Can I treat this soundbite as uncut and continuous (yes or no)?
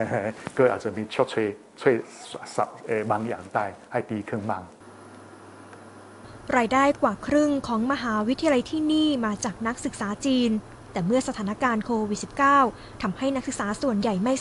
yes